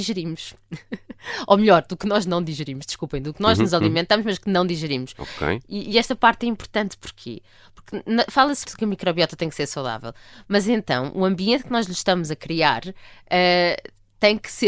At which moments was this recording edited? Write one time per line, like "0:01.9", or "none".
0:08.7